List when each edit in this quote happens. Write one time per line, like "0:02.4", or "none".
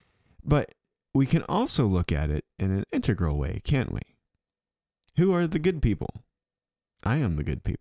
none